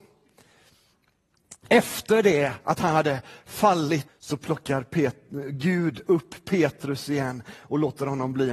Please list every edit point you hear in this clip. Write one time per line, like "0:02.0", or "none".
0:04.1

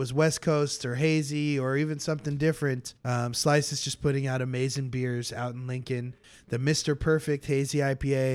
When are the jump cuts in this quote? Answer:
0:03.0
0:06.3

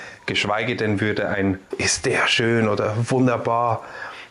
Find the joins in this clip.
0:01.7

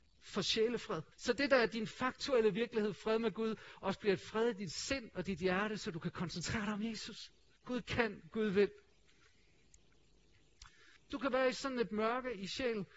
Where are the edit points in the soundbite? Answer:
0:01.1
0:07.6
0:11.0

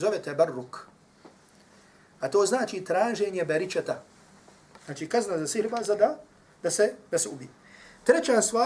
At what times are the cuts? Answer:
0:04.8

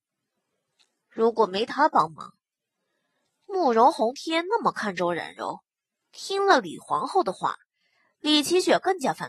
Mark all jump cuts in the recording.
0:06.0

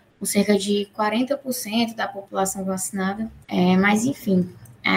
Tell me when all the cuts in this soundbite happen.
0:03.4

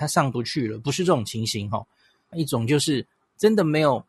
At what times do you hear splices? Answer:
0:02.3

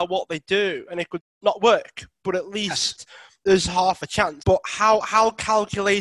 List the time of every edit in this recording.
0:01.2
0:04.4

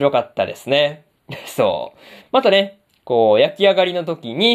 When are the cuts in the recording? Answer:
0:02.2

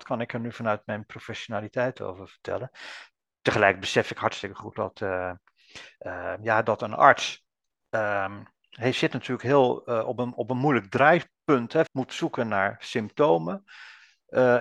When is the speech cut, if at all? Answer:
0:11.9

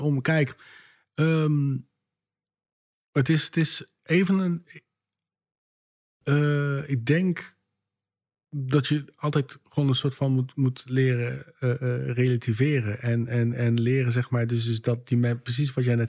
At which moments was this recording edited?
none

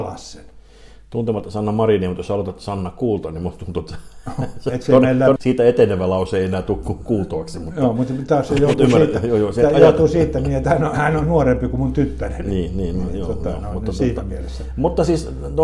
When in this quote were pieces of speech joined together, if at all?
0:05.4

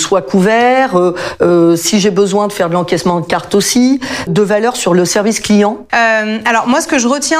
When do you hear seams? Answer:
0:04.3
0:05.9

